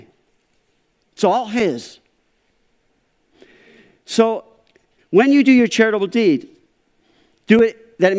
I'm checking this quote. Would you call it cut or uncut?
uncut